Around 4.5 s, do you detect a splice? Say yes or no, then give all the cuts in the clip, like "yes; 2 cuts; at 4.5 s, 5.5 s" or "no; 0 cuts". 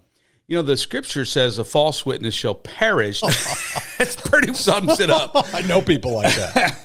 yes; 2 cuts; at 3.2 s, 4.5 s